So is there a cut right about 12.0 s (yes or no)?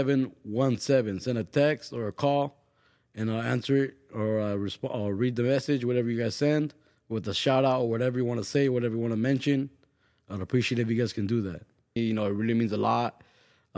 yes